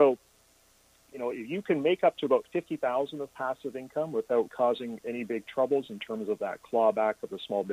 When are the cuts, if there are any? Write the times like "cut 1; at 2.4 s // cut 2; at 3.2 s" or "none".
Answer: cut 1; at 4.5 s